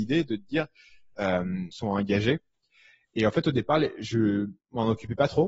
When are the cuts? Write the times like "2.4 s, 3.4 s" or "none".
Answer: 1.7 s